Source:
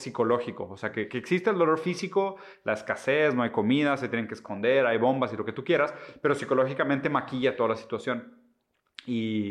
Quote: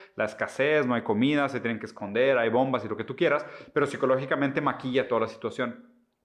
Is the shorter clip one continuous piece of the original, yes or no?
yes